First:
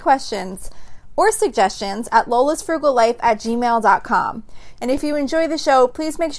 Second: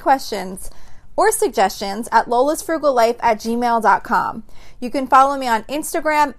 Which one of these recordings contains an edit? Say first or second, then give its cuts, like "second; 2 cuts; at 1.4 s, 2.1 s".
first; 1 cut; at 4.8 s